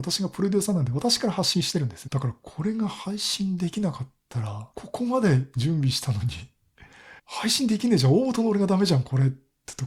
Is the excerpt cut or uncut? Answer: cut